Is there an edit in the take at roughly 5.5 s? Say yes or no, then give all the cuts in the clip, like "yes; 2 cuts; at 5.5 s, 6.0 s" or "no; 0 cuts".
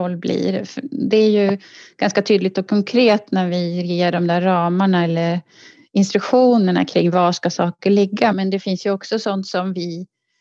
no; 1 cut; at 8.3 s